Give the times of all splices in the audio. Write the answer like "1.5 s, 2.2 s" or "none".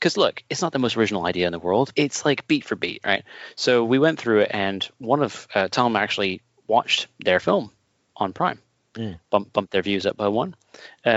1.9 s